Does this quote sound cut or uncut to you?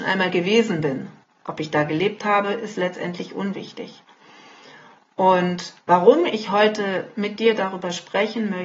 uncut